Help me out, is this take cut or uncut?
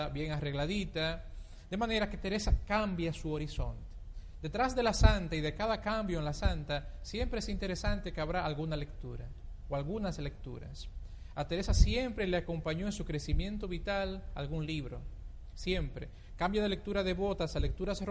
uncut